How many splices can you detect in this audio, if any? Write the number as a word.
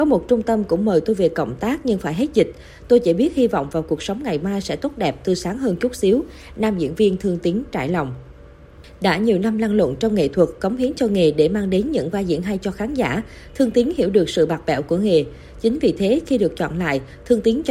zero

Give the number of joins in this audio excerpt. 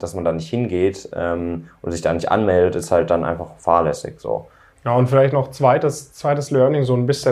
one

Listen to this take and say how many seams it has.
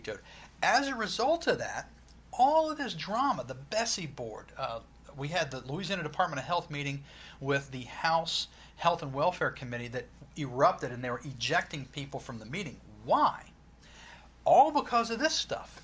zero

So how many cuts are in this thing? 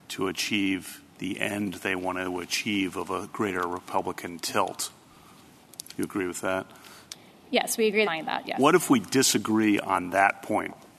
two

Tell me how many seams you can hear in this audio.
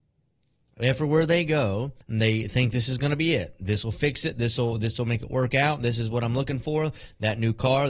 one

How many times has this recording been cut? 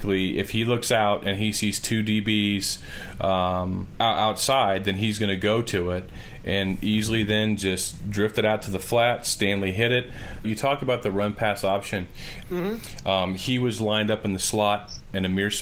three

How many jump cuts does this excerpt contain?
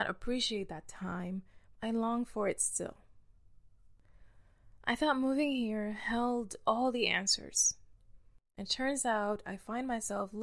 one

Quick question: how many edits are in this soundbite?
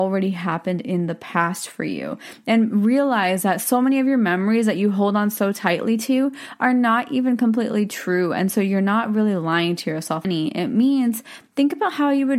one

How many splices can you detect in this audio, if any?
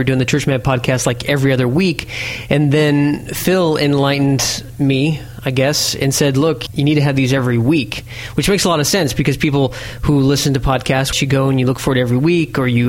two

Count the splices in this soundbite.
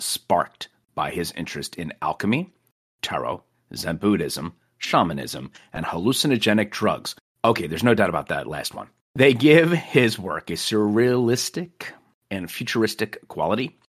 zero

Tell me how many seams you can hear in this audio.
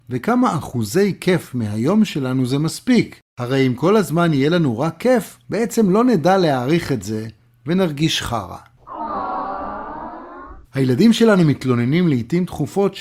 two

